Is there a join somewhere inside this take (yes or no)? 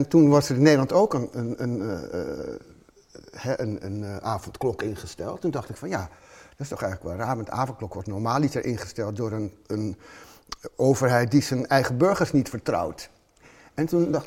no